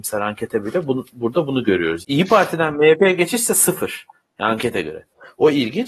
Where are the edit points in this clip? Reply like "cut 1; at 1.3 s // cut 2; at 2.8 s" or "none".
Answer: cut 1; at 2.0 s // cut 2; at 4.2 s